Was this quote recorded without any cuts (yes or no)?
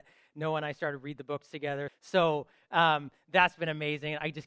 no